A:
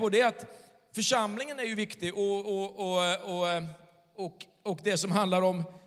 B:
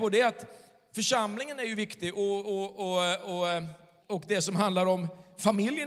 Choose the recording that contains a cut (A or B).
B